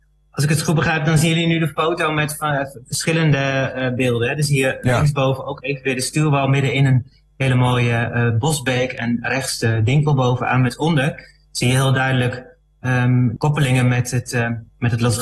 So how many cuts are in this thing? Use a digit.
1